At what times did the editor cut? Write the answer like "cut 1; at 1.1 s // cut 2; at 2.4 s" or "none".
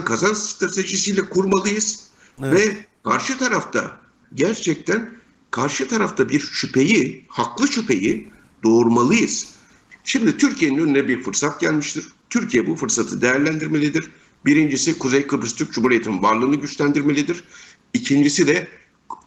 cut 1; at 4.2 s